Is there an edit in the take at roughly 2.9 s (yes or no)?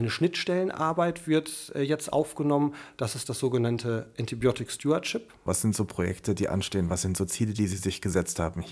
no